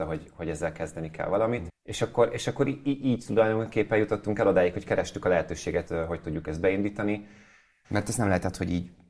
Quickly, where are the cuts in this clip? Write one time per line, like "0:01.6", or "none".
0:01.7
0:05.9
0:07.8